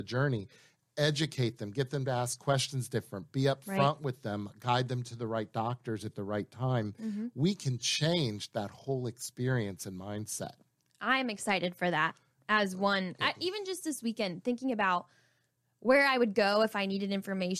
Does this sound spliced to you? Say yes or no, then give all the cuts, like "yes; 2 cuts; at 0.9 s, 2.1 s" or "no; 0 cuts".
no; 0 cuts